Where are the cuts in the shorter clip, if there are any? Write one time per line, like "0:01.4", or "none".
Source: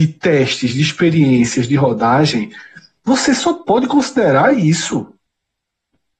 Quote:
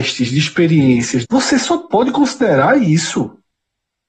0:01.2